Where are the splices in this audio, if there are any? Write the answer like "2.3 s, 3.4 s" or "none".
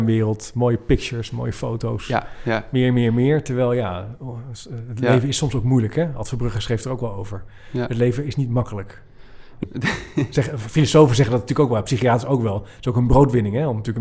9.6 s